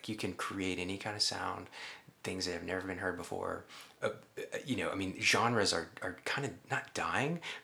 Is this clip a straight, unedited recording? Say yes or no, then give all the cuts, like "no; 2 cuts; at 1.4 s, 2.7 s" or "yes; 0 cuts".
yes; 0 cuts